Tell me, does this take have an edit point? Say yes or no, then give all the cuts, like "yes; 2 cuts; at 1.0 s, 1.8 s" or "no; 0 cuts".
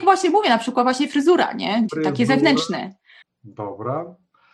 yes; 2 cuts; at 1.9 s, 3.2 s